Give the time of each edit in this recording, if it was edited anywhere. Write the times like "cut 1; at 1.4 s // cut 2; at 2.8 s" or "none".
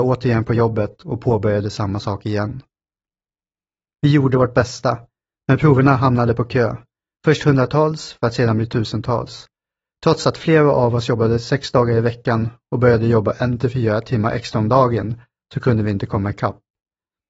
none